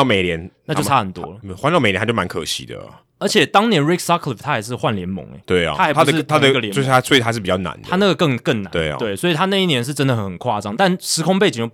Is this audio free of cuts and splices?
yes; 0 cuts

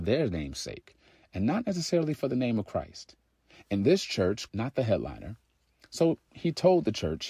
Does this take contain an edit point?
yes; 1 cut; at 4.5 s

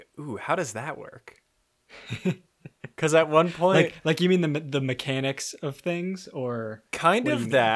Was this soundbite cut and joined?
no; 0 cuts

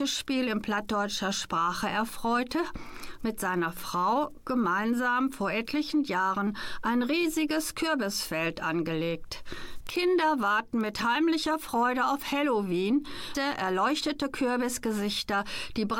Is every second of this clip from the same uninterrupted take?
no; 2 cuts; at 9.8 s, 13.3 s

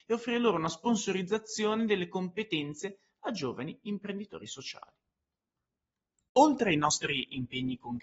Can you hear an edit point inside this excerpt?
no; 0 cuts

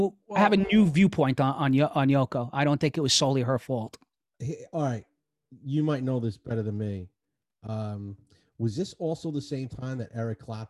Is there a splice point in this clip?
no; 0 cuts

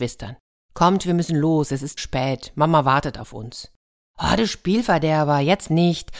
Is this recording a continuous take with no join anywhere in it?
no; 1 cut; at 2.0 s

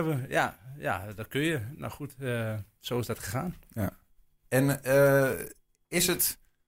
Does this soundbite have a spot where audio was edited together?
no; 0 cuts

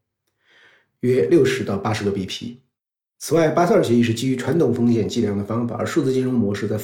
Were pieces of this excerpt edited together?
no; 0 cuts

